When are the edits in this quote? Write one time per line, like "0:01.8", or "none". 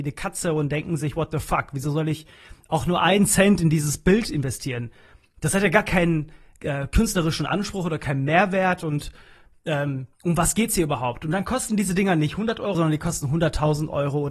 0:10.1
0:12.7